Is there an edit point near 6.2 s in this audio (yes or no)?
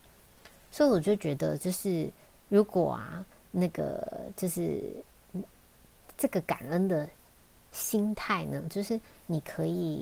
yes